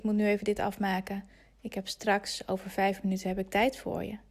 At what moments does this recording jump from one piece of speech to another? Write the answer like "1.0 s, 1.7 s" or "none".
none